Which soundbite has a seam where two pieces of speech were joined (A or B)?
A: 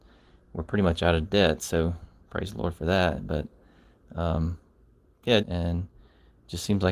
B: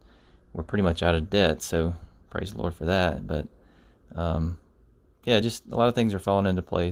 A